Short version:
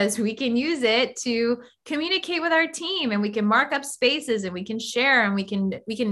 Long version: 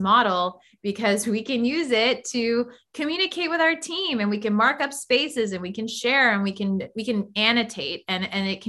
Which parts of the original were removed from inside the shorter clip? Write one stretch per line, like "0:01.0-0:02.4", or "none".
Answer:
none